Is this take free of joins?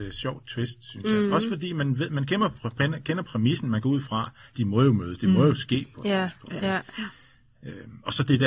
yes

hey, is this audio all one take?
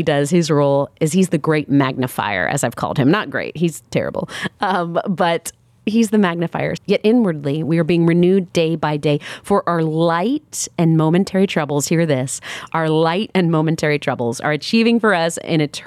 no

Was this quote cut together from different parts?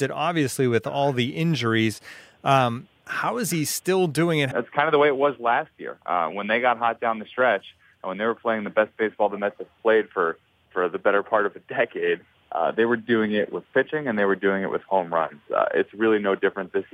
yes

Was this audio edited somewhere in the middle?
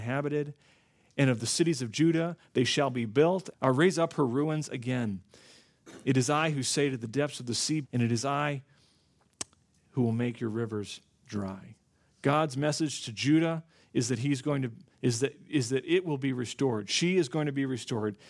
yes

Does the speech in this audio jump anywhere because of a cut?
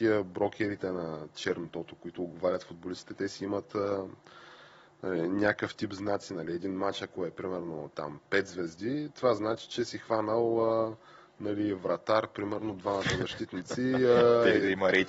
no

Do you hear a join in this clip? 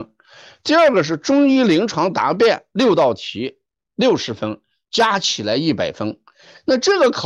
no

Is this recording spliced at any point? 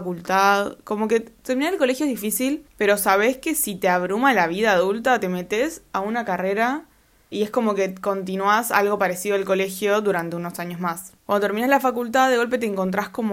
yes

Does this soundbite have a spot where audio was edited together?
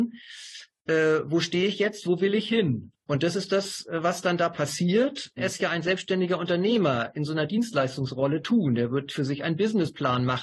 yes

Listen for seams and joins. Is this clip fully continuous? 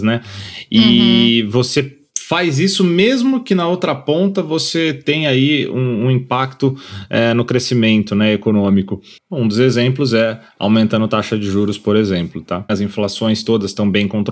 no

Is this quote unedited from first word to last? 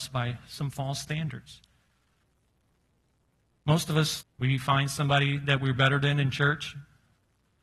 no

